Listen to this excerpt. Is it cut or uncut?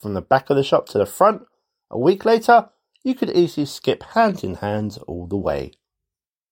uncut